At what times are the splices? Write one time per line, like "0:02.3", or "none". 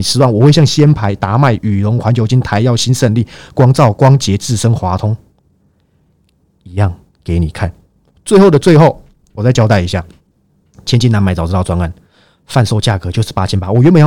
none